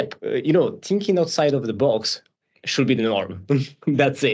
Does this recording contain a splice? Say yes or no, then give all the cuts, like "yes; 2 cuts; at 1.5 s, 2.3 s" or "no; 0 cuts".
no; 0 cuts